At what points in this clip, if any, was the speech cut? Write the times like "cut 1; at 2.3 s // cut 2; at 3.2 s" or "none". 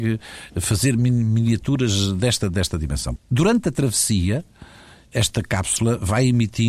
cut 1; at 3.2 s